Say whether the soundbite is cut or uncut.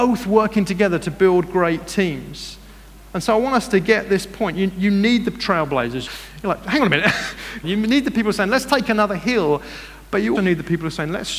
cut